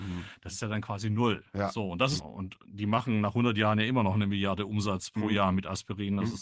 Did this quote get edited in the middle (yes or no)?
yes